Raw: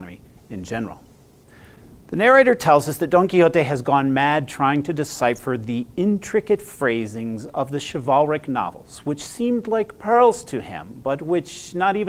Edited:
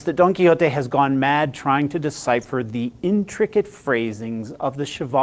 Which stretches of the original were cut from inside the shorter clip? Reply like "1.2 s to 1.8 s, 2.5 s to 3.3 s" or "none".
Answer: none